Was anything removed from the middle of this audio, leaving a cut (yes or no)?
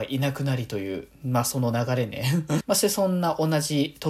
yes